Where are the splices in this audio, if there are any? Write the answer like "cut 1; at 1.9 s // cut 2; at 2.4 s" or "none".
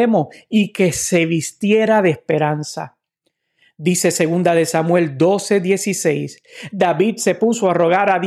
none